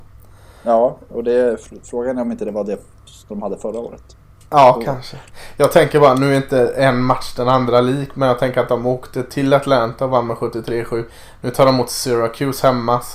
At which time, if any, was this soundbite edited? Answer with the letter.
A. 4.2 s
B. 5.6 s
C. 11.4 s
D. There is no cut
D